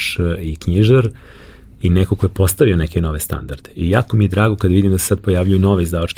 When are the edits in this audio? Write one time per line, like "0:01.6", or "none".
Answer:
none